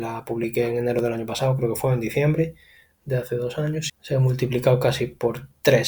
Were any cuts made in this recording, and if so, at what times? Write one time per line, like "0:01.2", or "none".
0:03.9